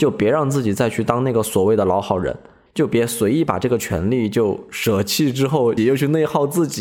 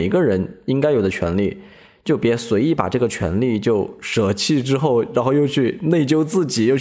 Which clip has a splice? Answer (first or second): first